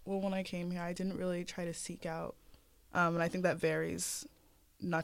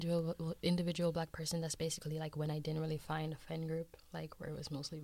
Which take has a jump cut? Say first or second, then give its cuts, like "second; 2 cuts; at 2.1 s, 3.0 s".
first; 1 cut; at 2.9 s